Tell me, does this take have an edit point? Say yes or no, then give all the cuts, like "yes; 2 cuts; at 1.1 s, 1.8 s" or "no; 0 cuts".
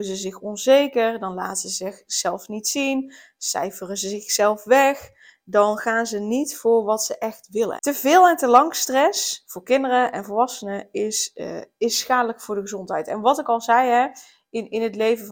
yes; 1 cut; at 7.8 s